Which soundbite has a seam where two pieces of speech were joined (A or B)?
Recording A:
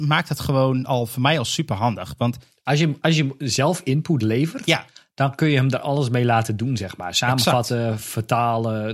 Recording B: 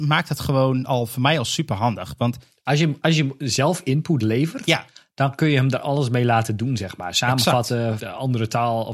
B